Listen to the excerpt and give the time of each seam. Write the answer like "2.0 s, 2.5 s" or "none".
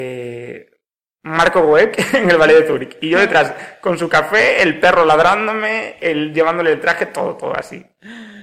none